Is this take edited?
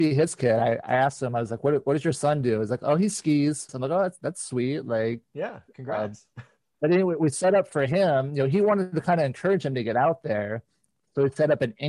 yes; 1 cut; at 3.7 s

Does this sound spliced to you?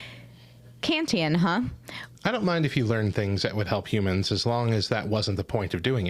yes; 1 cut; at 2.1 s

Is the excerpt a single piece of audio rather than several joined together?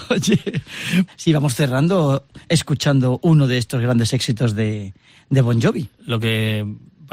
no; 2 cuts; at 1.1 s, 6.0 s

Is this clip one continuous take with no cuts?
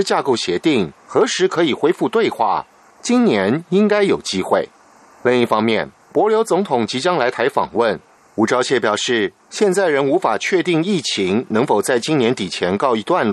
no; 2 cuts; at 2.9 s, 8.2 s

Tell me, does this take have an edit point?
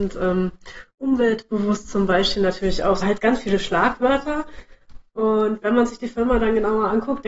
yes; 1 cut; at 3.0 s

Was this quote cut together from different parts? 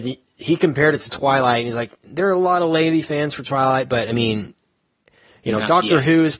no; 0 cuts

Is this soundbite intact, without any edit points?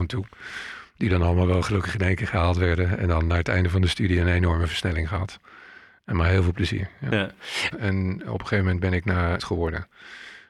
no; 2 cuts; at 7.7 s, 9.4 s

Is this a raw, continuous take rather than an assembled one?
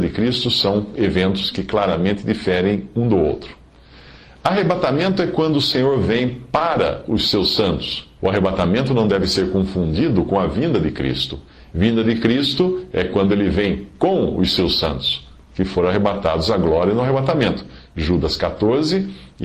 no; 2 cuts; at 8.2 s, 11.7 s

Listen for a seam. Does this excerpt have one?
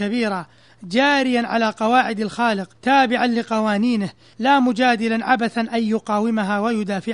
yes; 1 cut; at 2.8 s

